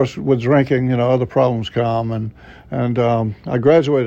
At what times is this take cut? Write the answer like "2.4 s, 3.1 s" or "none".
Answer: none